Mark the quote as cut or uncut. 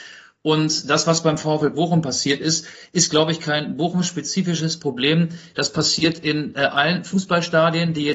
uncut